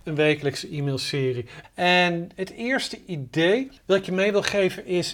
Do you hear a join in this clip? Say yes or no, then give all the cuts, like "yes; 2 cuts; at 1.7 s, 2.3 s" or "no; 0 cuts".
yes; 2 cuts; at 1.6 s, 3.8 s